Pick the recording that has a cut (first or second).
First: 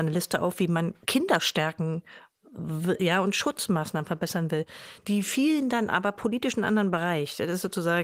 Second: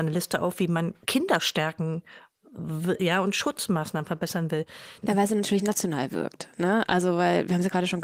second